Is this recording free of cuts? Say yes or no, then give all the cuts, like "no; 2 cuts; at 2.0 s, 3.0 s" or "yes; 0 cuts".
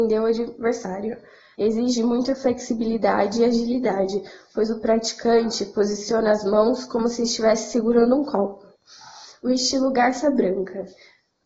no; 1 cut; at 1.5 s